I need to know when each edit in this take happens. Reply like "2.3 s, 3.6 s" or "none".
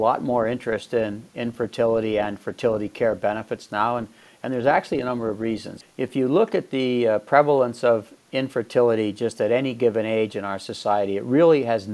none

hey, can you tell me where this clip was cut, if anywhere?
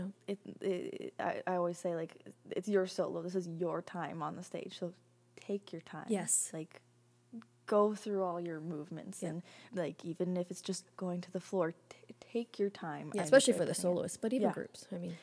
9.7 s, 13.2 s

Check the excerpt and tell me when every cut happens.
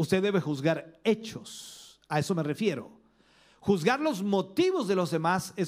none

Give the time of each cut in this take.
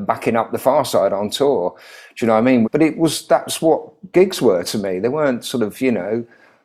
2.6 s

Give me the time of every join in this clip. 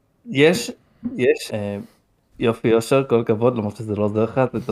1.5 s

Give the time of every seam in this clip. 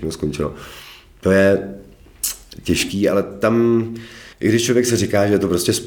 4.3 s

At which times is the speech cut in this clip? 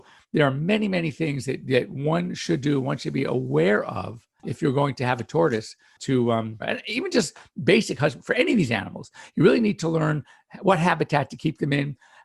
6.6 s

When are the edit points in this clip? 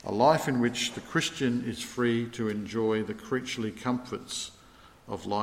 none

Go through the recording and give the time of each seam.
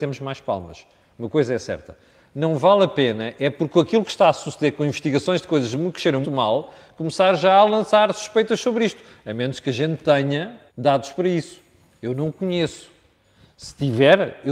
6.2 s, 10.7 s

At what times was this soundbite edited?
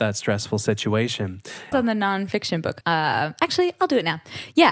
1.7 s, 2.8 s

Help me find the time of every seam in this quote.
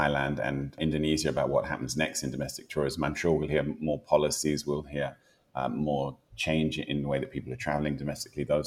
none

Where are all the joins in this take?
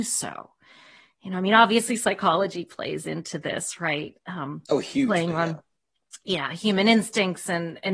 none

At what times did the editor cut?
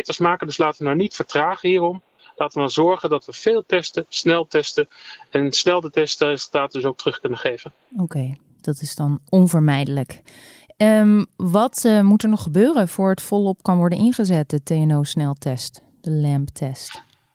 none

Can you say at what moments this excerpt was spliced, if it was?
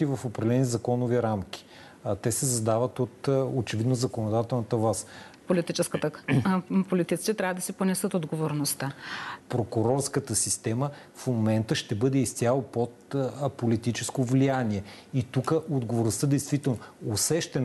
5.4 s, 9.4 s

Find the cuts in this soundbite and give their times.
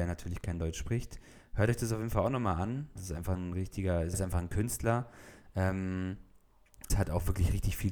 3.0 s, 4.1 s, 6.9 s

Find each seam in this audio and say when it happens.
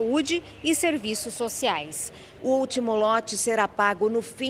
2.4 s

